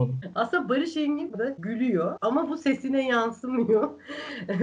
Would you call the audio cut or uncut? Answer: cut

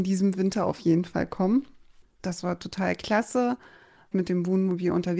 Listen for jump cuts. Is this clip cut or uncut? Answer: cut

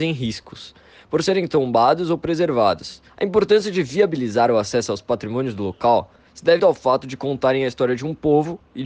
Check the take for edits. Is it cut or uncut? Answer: cut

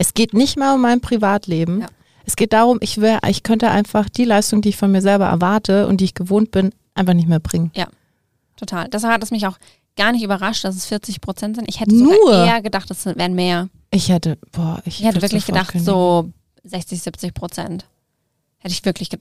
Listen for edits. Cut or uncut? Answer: uncut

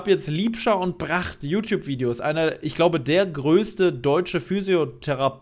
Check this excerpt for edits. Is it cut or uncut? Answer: uncut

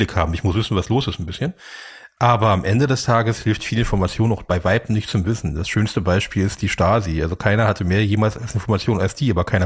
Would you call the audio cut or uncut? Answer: uncut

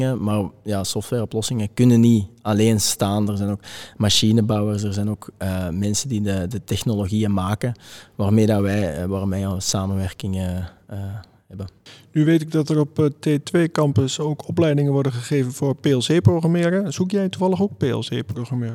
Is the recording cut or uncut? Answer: uncut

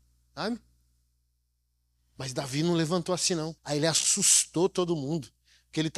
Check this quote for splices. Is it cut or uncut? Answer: cut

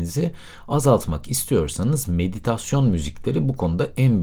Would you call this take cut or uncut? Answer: uncut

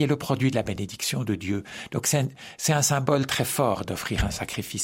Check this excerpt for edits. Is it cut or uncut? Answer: uncut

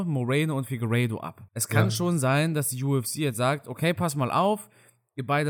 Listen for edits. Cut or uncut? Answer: cut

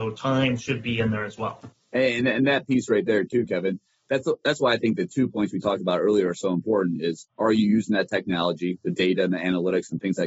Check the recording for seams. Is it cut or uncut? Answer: uncut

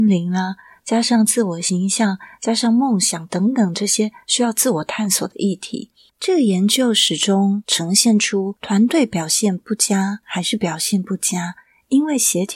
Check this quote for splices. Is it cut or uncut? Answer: cut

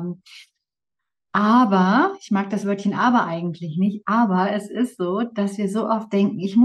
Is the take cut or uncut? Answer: uncut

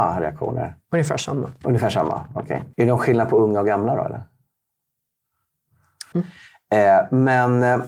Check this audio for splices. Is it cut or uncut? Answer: cut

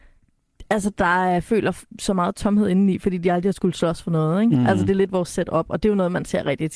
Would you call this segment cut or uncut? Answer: uncut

